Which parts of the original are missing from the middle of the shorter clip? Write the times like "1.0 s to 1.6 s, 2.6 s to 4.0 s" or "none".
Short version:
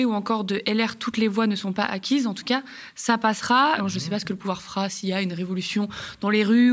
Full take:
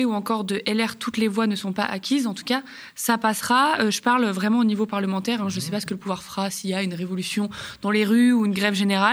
3.8 s to 5.4 s